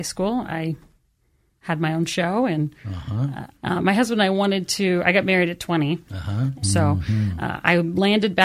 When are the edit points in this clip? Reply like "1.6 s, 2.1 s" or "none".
3.5 s, 6.6 s